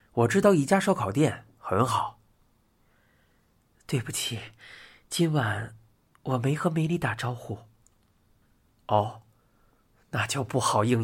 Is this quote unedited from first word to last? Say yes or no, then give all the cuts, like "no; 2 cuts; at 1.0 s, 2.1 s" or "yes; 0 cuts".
yes; 0 cuts